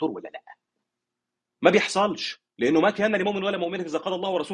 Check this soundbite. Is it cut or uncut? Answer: cut